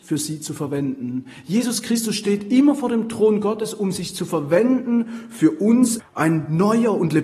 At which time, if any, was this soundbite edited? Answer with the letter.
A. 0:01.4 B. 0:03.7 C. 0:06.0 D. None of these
C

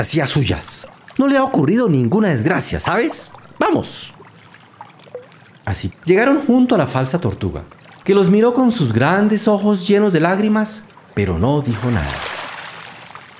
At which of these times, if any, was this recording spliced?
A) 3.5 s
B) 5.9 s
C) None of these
B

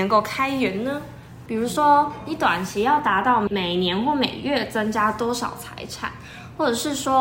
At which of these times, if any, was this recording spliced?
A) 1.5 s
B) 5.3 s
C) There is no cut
A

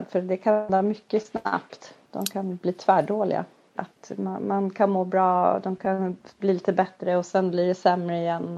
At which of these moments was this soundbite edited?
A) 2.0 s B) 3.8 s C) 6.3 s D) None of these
B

